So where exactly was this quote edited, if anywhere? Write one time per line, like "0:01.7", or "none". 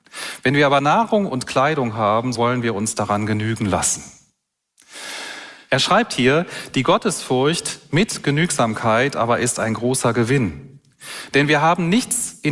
0:02.4
0:05.7